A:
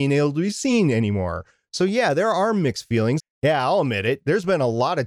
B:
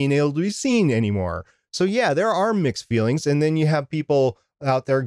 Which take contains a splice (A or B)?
A